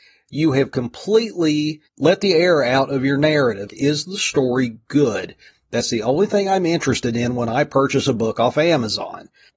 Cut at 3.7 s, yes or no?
yes